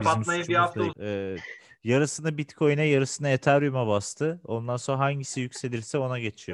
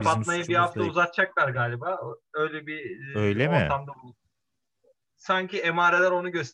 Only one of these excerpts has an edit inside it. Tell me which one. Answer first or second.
first